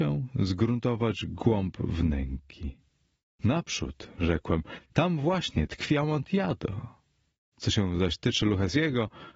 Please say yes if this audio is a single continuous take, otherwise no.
no